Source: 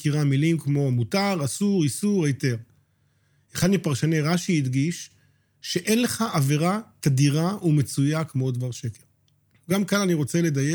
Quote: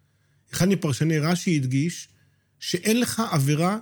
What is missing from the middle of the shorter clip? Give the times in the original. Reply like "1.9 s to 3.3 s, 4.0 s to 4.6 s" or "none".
none